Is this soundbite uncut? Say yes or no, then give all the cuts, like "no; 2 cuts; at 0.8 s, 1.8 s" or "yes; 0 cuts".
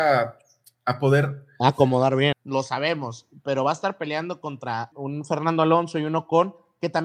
no; 2 cuts; at 2.3 s, 4.9 s